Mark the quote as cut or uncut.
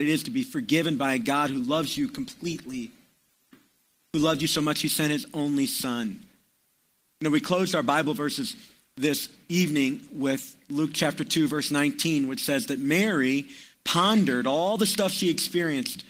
uncut